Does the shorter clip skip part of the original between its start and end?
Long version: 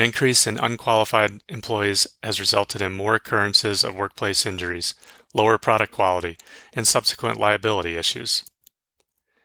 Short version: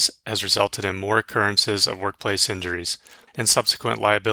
yes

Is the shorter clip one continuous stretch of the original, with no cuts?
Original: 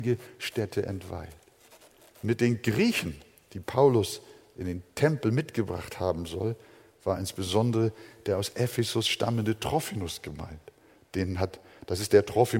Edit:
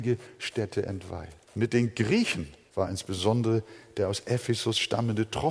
no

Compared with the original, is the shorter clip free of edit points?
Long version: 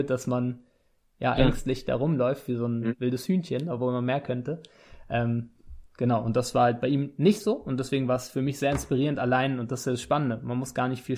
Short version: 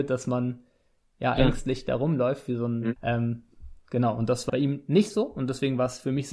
no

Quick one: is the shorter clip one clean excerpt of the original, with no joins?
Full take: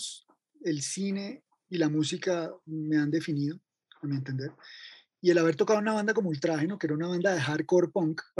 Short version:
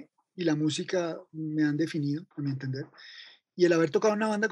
no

